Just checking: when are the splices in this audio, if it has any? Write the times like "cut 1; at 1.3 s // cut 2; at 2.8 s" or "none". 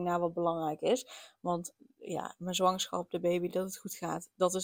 none